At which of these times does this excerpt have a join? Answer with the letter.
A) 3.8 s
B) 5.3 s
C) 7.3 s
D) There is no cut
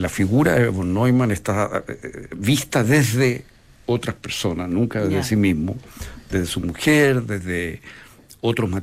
D